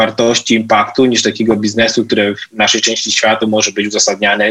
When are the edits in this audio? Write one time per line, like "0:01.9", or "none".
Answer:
0:03.4